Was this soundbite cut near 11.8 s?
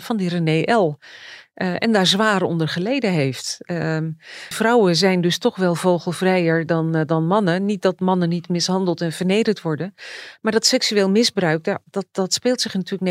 no; 1 cut; at 4.5 s

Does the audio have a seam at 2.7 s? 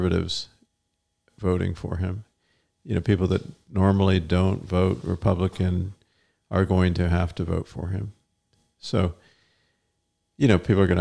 no; 0 cuts

